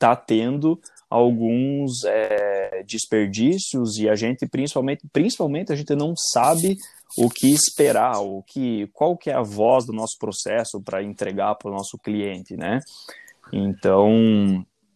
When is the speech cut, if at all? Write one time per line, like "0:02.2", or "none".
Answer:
0:08.4